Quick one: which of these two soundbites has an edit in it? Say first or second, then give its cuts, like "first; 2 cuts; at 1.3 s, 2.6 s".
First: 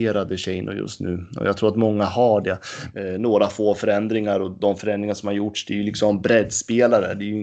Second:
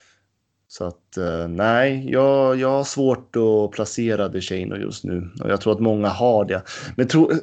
first; 1 cut; at 2.9 s